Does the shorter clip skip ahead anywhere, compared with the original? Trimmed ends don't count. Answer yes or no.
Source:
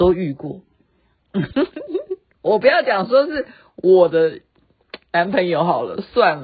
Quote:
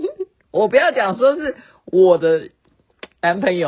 no